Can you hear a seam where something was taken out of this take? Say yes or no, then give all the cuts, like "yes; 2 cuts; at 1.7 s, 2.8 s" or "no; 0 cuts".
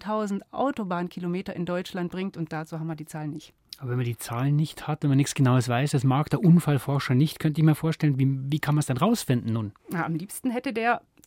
yes; 1 cut; at 9.8 s